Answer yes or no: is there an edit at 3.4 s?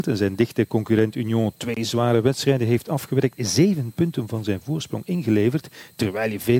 no